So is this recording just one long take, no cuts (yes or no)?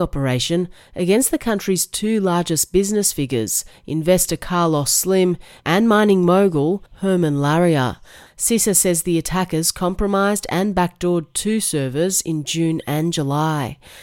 no